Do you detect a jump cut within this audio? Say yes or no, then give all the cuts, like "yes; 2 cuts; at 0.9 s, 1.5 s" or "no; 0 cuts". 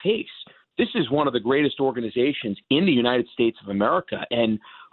no; 0 cuts